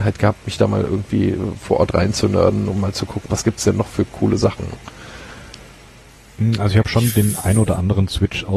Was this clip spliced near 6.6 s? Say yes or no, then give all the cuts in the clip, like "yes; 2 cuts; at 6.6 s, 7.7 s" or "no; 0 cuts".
no; 1 cut; at 3.3 s